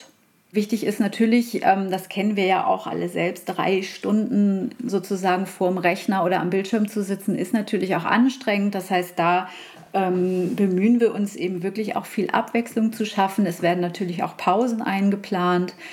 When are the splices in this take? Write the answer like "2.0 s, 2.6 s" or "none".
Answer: none